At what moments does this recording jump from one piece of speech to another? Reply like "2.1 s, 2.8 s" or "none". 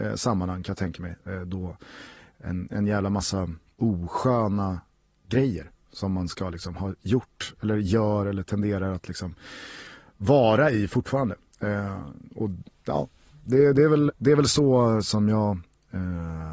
14.1 s